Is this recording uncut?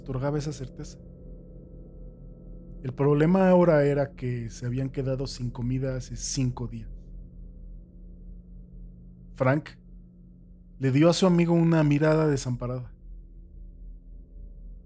yes; 0 cuts

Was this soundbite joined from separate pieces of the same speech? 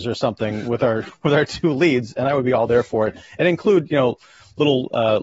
no; 0 cuts

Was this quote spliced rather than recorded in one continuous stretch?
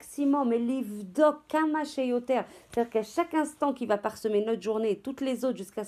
no; 0 cuts

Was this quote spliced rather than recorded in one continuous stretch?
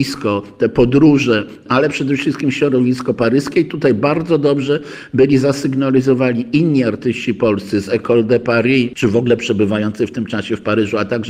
no; 0 cuts

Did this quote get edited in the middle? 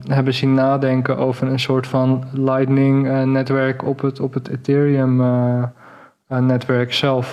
no; 0 cuts

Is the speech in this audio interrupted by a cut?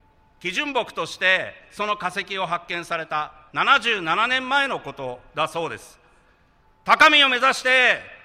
yes; 1 cut; at 6.6 s

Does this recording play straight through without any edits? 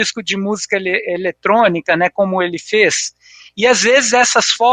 yes; 0 cuts

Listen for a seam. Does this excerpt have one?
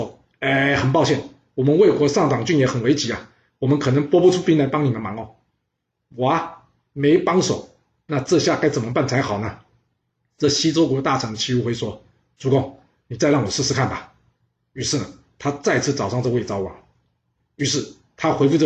yes; 1 cut; at 17.4 s

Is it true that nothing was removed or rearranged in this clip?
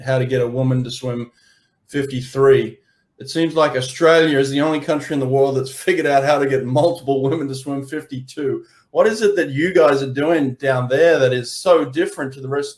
yes; 0 cuts

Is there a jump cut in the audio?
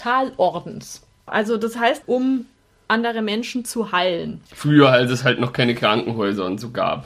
yes; 2 cuts; at 2.0 s, 4.5 s

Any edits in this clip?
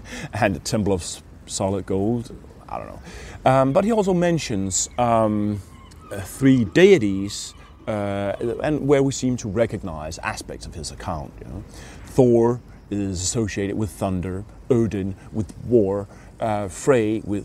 no; 0 cuts

